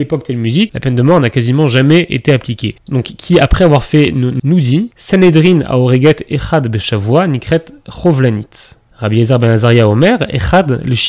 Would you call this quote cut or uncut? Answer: cut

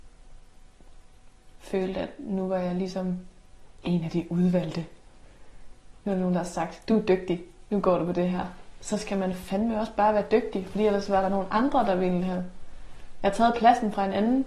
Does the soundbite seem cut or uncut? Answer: uncut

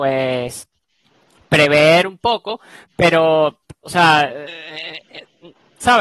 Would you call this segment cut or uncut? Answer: uncut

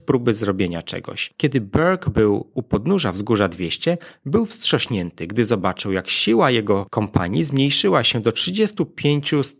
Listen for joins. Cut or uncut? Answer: uncut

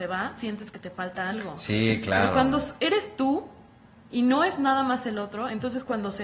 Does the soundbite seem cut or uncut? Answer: uncut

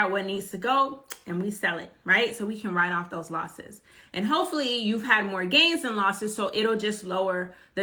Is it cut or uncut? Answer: uncut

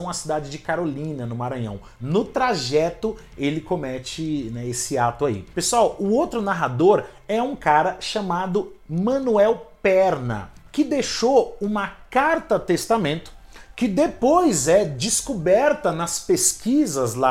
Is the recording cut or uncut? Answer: cut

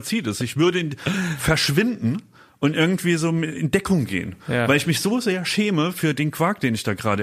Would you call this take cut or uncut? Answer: uncut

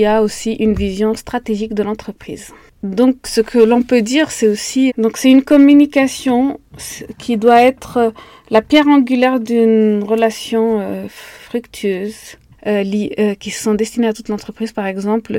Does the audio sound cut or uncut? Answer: cut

